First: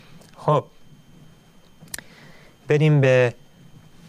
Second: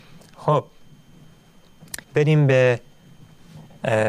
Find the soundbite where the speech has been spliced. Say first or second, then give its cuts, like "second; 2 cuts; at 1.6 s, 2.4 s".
second; 1 cut; at 2.0 s